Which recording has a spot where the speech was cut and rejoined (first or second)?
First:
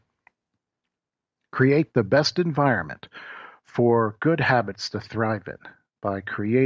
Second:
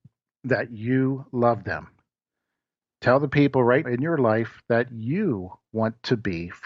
second